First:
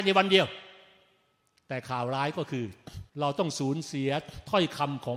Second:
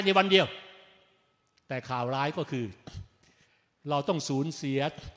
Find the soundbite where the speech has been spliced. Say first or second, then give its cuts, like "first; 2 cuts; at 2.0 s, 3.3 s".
first; 1 cut; at 3.1 s